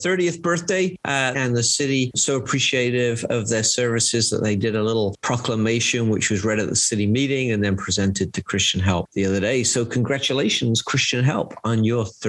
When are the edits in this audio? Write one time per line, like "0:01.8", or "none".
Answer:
0:01.3